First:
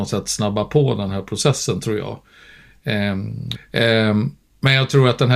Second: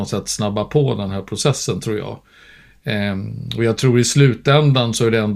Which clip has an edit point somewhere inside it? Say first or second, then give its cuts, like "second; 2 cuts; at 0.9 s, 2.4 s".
first; 1 cut; at 3.5 s